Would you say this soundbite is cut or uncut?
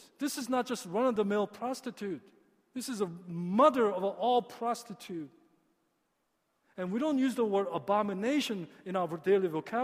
uncut